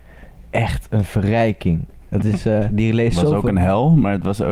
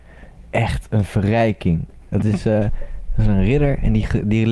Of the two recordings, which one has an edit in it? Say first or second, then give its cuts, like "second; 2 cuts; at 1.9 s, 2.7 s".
first; 1 cut; at 2.7 s